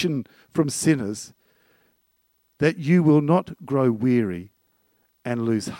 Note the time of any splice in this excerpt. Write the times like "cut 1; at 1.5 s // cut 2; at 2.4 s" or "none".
none